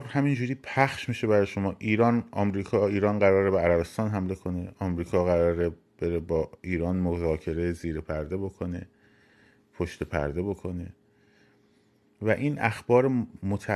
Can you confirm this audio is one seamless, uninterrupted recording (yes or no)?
yes